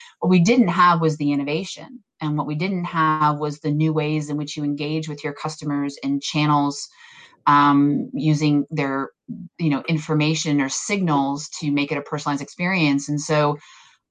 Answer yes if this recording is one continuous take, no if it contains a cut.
yes